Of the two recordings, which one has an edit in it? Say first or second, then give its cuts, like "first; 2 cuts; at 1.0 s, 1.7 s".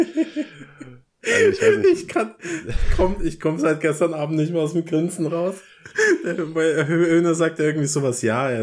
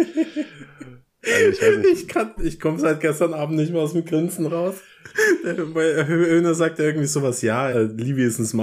second; 2 cuts; at 2.4 s, 7.7 s